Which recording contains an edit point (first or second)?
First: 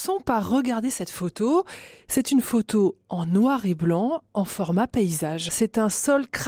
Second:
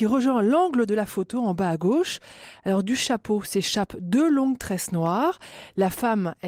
first